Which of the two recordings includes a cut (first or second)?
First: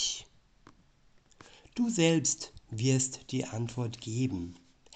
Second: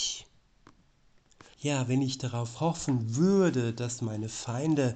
second